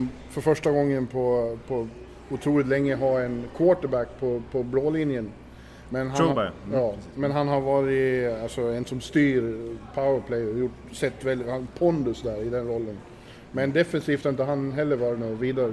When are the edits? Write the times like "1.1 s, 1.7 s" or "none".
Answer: none